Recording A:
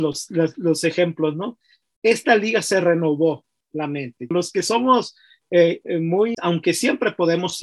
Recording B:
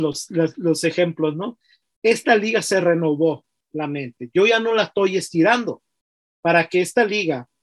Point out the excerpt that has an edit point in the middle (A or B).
A